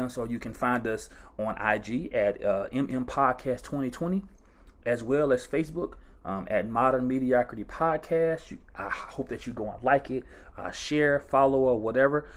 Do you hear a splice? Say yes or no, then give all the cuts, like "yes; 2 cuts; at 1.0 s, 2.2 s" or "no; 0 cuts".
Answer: no; 0 cuts